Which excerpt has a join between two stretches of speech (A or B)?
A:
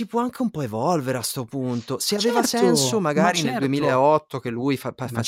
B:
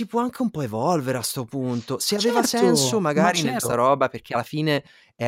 B